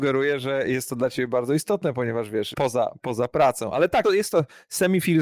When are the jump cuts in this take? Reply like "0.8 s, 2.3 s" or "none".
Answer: 2.5 s, 4.0 s